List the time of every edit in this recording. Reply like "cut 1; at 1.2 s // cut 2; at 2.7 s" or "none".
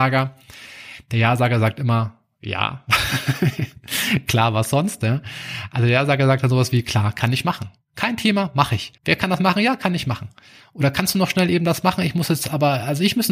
cut 1; at 9.0 s